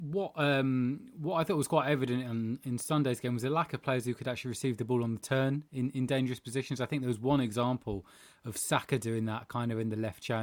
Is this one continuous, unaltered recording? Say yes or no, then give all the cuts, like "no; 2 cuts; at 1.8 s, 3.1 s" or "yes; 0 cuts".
yes; 0 cuts